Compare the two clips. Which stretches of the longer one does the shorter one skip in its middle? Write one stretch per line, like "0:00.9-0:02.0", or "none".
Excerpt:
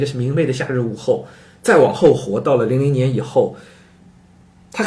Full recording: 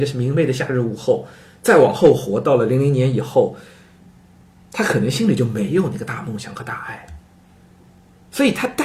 none